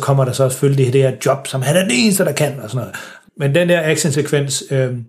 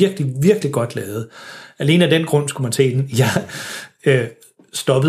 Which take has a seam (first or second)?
first